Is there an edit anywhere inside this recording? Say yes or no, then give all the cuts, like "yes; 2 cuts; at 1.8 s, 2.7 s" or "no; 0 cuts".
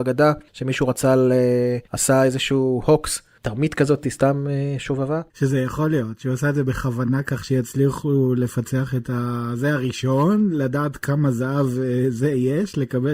no; 0 cuts